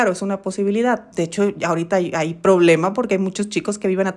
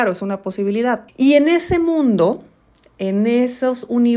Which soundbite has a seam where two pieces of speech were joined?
second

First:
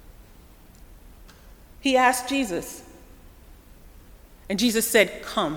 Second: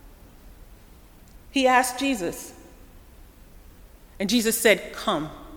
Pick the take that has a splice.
second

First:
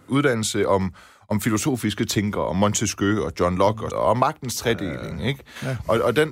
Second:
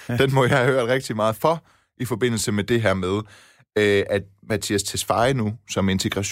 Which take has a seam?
first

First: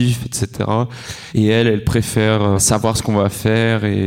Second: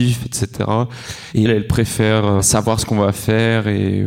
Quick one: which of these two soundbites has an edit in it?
second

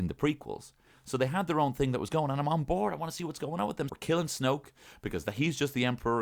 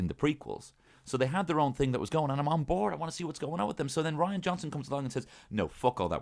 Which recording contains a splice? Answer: first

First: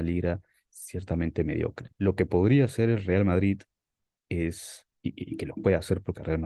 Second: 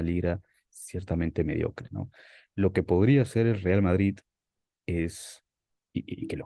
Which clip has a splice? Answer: first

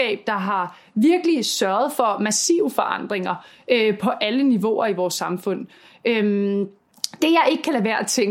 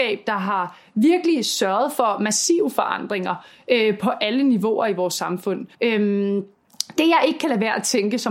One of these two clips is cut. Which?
second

